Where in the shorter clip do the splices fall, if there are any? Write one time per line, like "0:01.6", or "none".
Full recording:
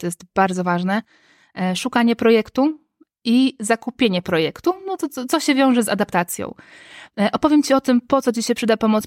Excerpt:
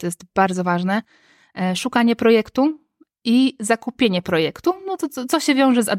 none